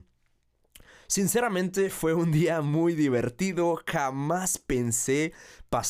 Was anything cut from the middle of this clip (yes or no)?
no